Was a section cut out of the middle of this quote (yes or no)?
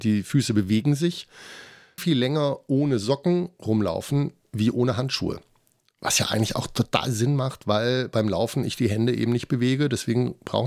yes